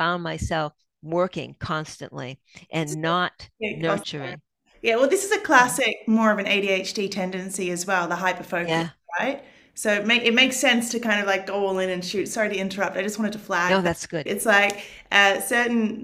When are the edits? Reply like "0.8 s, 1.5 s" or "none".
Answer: 14.3 s